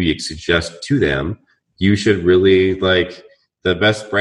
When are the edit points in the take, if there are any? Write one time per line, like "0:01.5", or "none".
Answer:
none